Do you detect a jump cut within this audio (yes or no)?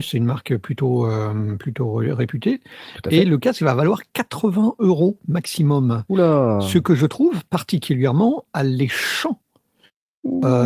no